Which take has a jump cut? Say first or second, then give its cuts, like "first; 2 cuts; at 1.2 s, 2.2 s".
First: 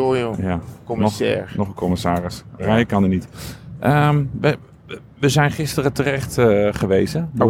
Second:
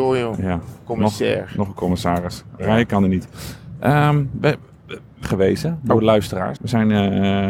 second; 2 cuts; at 5.2 s, 6.6 s